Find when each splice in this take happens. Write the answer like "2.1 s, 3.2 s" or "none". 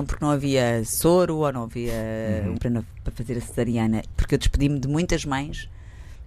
2.6 s, 4.1 s

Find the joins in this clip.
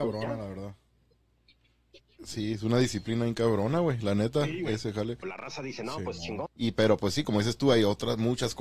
5.2 s, 6.5 s

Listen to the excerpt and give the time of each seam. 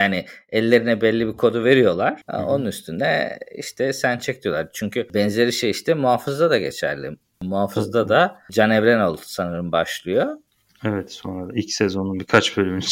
none

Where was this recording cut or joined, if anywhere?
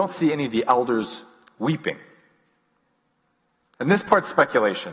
3.7 s

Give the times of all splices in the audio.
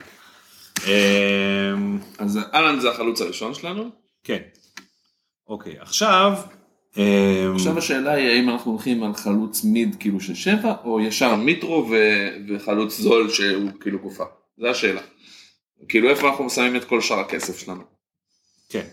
none

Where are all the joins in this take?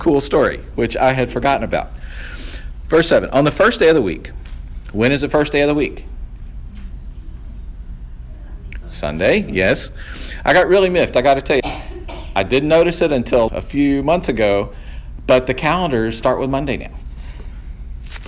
11.6 s, 13.5 s

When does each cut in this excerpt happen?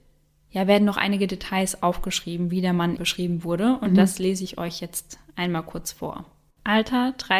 3.0 s

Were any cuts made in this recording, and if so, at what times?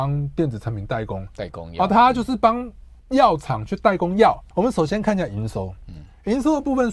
3.0 s, 4.5 s

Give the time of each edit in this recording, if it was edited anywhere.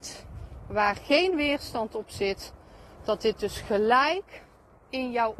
none

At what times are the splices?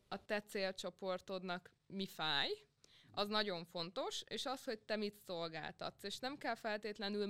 none

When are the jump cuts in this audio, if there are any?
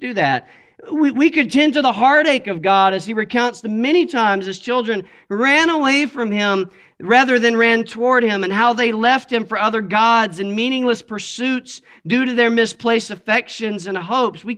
none

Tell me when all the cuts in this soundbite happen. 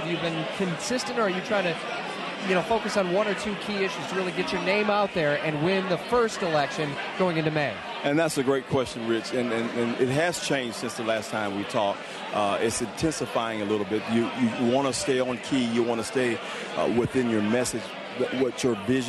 none

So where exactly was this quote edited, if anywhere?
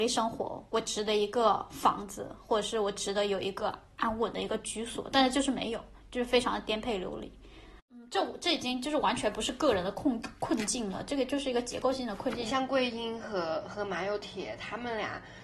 none

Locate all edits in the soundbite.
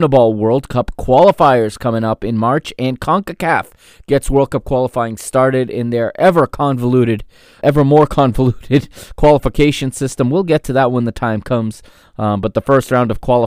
7.6 s

